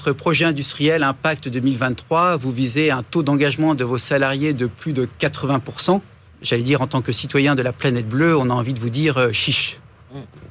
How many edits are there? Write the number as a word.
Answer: one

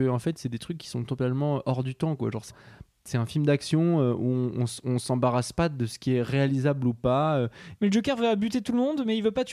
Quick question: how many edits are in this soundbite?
two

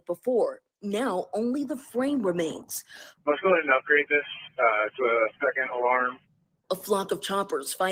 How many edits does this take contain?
one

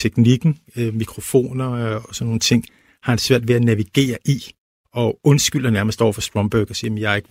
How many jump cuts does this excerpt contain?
one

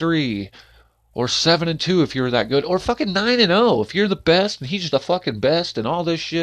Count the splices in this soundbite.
one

